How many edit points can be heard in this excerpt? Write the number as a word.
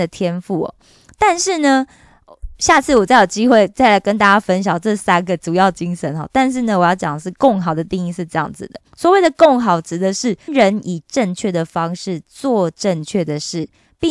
two